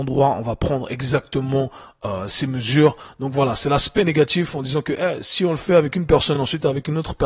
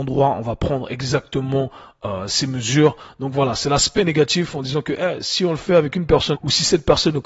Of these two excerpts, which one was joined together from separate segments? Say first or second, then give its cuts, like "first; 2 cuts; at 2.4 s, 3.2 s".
second; 1 cut; at 6.3 s